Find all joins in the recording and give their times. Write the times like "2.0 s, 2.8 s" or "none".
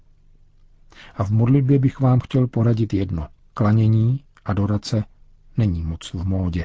3.4 s